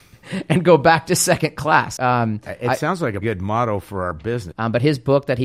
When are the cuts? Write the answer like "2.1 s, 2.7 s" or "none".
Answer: 2.0 s, 3.2 s, 4.5 s